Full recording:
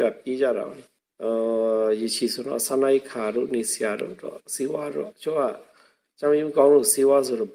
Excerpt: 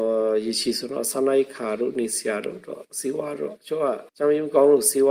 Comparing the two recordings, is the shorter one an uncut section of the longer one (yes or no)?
no